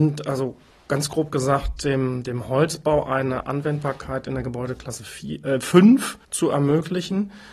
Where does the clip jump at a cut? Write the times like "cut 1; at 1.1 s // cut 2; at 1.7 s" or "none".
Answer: cut 1; at 6.3 s